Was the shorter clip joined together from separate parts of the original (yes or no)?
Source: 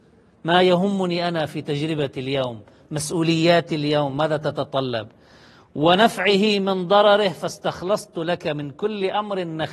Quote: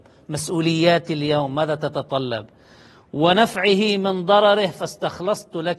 no